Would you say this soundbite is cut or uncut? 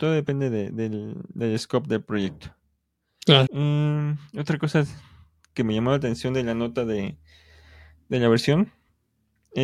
cut